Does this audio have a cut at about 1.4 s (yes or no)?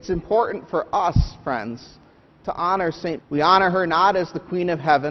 no